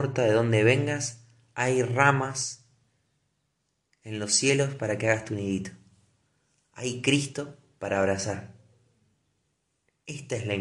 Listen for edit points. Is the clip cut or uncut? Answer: uncut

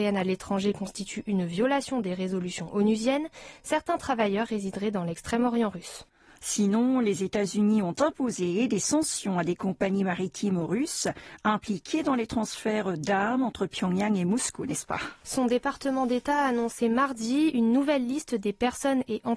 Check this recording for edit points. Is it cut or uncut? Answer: uncut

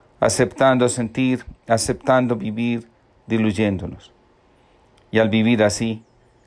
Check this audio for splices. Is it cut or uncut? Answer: uncut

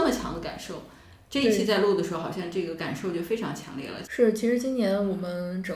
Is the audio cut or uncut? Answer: cut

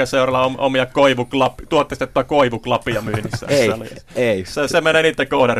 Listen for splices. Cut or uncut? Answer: uncut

